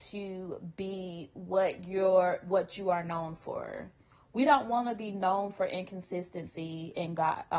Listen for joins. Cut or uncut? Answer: uncut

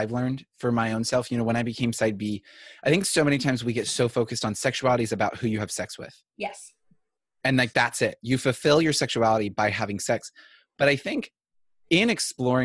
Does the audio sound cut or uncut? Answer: uncut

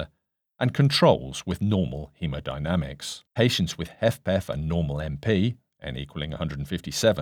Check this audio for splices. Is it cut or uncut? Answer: cut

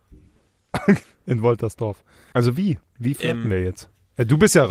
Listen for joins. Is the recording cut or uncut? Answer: cut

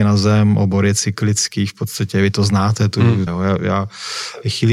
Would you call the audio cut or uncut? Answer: cut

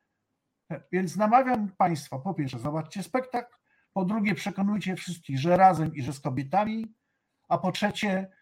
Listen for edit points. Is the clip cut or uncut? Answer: uncut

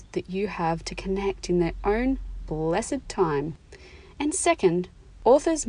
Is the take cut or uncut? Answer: uncut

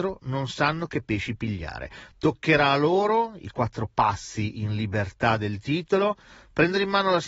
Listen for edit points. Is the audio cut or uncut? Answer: uncut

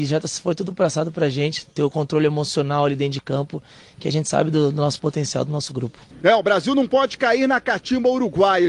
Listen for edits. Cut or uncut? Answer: uncut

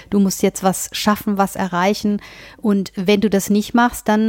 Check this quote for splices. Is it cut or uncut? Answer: uncut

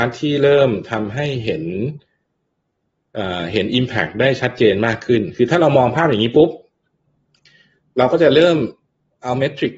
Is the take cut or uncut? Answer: uncut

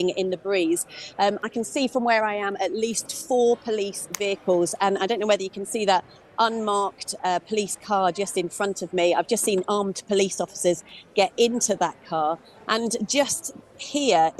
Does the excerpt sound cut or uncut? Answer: uncut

